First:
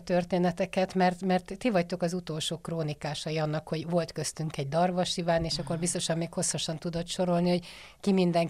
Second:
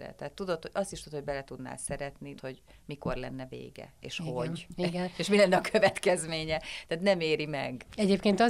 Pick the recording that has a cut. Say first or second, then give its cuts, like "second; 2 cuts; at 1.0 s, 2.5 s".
second; 1 cut; at 2.4 s